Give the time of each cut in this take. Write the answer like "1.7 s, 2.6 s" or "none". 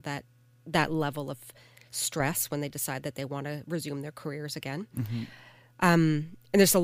none